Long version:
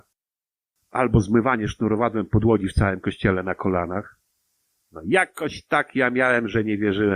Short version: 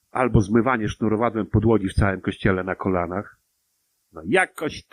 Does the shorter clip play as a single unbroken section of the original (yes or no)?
yes